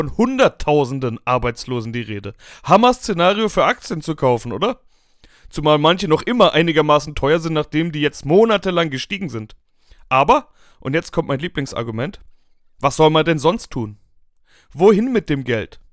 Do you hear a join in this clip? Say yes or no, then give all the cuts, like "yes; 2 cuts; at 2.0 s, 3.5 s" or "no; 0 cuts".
no; 0 cuts